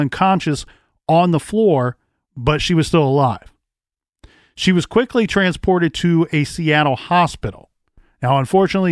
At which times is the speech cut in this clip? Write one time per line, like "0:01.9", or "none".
none